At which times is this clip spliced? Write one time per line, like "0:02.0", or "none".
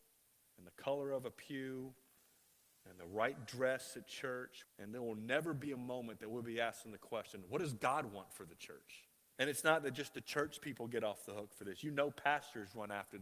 0:04.6
0:09.3

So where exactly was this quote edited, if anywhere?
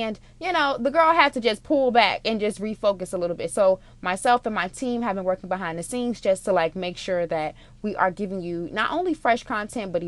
none

